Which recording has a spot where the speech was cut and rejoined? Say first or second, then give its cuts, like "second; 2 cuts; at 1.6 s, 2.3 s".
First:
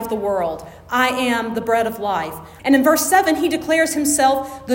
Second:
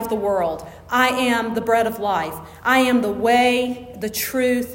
first; 1 cut; at 2.6 s